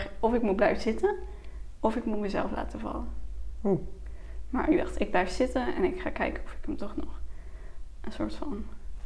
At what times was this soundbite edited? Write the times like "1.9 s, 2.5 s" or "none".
none